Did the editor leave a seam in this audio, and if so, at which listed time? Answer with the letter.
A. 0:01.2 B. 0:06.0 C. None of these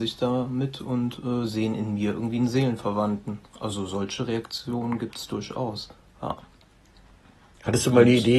B